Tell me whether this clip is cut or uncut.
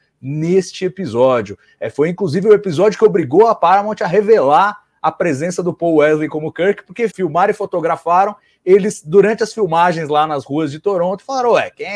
cut